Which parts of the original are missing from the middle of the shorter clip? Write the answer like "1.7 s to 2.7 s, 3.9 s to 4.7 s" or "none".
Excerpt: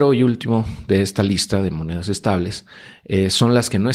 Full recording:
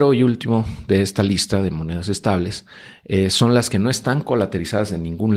none